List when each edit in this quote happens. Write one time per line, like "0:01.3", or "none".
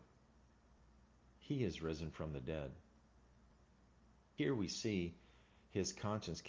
0:01.3